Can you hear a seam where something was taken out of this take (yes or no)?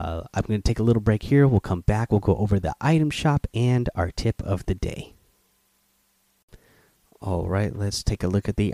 no